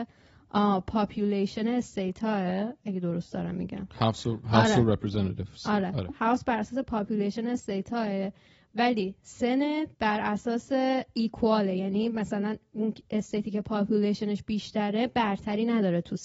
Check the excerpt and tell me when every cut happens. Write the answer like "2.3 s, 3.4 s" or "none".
2.8 s, 9.9 s